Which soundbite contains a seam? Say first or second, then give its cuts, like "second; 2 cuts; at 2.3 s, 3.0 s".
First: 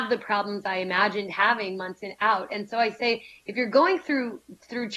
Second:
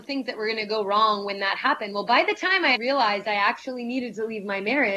second; 1 cut; at 2.8 s